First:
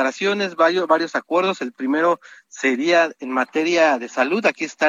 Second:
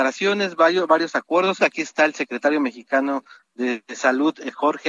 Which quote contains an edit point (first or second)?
second